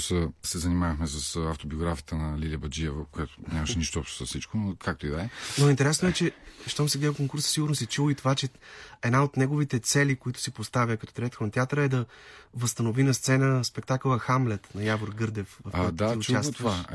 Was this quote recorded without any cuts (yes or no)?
yes